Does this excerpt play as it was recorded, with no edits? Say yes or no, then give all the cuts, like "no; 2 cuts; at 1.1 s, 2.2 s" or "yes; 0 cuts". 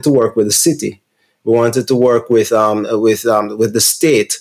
yes; 0 cuts